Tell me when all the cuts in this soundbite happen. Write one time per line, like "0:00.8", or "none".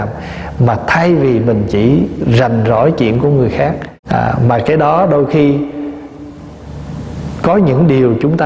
0:04.0